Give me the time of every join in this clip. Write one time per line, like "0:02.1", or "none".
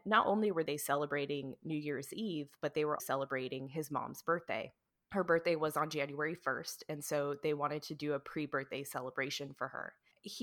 0:03.0